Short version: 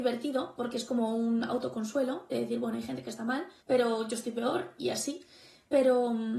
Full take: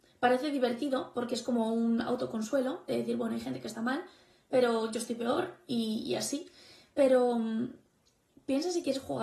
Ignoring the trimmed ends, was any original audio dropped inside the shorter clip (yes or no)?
yes